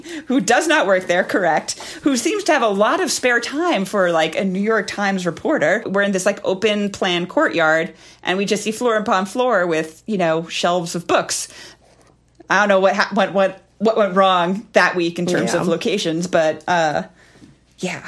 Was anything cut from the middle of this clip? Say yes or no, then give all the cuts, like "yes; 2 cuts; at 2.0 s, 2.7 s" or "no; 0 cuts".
yes; 1 cut; at 5.8 s